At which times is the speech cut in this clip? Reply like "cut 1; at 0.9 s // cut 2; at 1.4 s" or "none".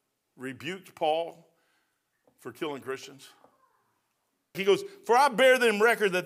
cut 1; at 4.5 s